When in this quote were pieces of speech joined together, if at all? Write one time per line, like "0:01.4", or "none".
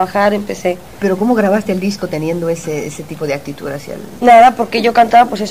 none